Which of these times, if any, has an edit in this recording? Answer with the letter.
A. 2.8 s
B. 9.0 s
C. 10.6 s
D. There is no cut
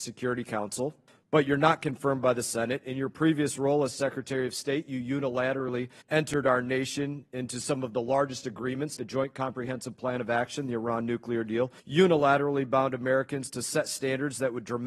B